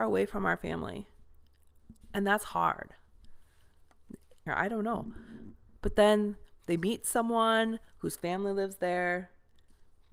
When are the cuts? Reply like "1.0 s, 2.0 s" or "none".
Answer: 4.5 s

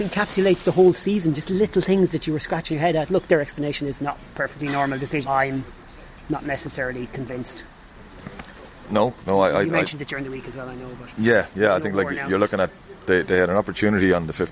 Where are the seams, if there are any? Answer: 5.2 s

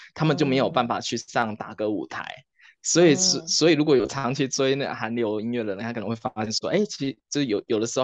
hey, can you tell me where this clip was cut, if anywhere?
none

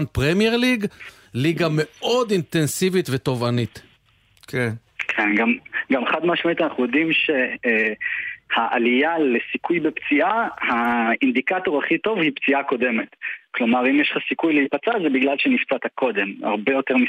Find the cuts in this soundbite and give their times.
none

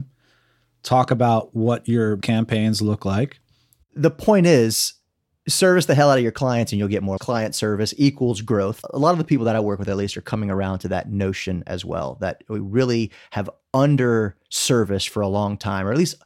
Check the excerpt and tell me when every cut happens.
3.8 s

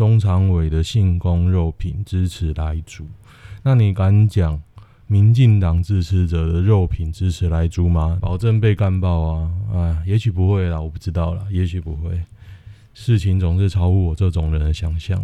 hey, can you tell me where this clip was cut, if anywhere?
8.2 s

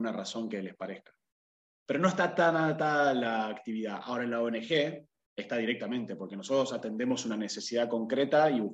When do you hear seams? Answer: none

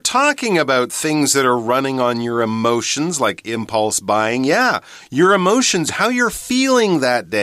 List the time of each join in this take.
5.9 s

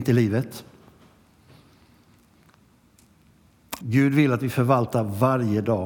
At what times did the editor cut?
3.8 s

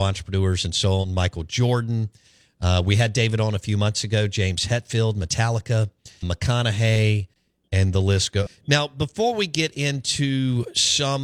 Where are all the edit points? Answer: 6.2 s, 8.5 s

